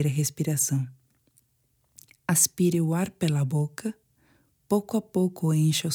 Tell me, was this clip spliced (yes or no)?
no